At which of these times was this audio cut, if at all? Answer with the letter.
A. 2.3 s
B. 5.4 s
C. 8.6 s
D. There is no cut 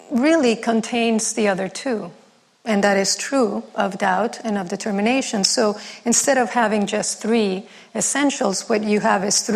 D